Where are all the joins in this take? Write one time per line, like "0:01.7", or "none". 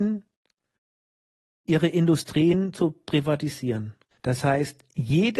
0:04.1